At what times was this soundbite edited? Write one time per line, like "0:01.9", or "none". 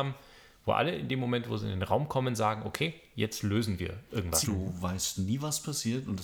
0:04.4